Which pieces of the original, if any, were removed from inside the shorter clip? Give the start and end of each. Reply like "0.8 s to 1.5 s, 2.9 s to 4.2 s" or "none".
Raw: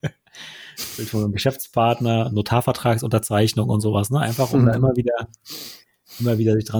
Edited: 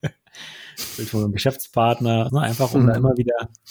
2.3 s to 4.1 s